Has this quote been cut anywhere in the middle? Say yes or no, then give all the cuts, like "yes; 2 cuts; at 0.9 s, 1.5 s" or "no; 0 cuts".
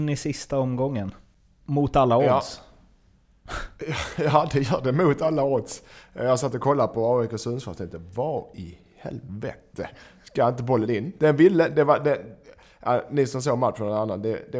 no; 0 cuts